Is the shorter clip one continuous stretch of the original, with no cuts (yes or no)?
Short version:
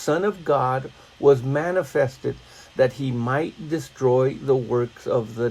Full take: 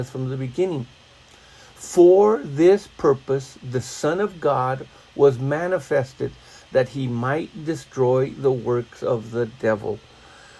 yes